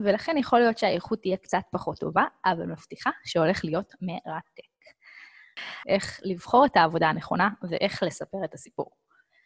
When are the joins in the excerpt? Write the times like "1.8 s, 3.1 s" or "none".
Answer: 5.8 s